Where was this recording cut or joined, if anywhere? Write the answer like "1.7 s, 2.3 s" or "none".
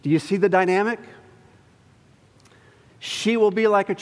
2.9 s